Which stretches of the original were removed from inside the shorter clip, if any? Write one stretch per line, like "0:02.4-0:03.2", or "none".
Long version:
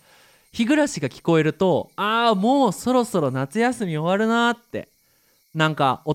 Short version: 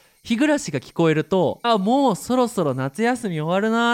0:01.9-0:02.2